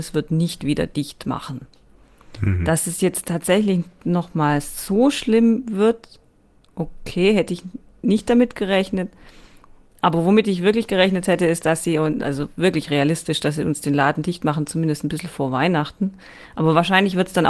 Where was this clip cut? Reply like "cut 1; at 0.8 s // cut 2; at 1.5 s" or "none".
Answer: none